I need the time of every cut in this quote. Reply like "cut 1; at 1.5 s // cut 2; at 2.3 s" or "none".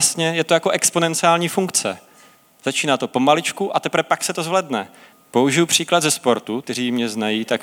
cut 1; at 5.1 s // cut 2; at 6.6 s